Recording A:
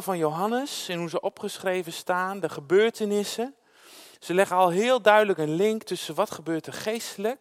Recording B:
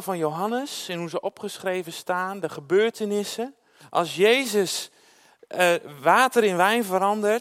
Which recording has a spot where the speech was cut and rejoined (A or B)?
B